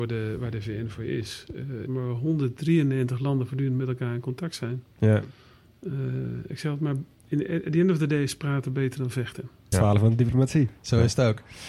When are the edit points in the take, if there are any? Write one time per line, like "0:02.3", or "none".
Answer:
0:01.9
0:09.7